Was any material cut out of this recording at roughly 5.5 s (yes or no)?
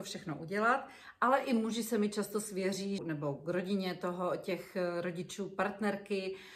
no